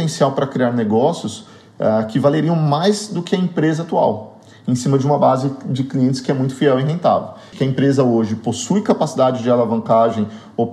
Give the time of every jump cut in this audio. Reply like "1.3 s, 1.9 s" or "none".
7.5 s